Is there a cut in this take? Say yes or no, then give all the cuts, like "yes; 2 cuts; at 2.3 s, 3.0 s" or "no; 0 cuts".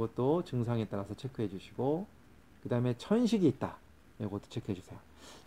no; 0 cuts